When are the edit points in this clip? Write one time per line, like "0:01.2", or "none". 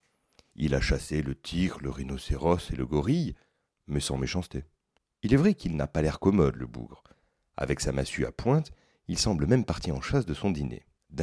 none